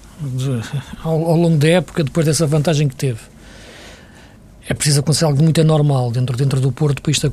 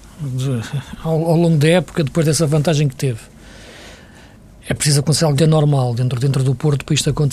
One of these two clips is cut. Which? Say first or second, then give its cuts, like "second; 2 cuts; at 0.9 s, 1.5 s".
second; 1 cut; at 5.4 s